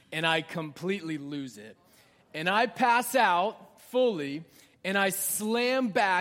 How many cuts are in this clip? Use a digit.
0